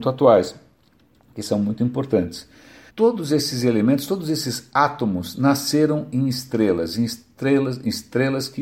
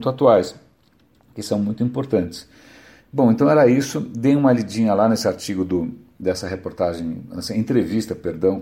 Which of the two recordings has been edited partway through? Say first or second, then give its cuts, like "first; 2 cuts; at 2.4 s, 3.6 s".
first; 1 cut; at 2.9 s